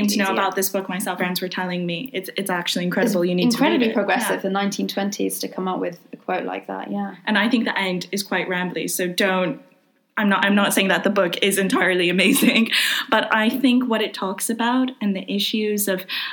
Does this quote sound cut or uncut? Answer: cut